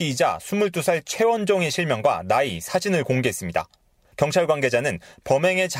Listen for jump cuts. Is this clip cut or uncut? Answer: uncut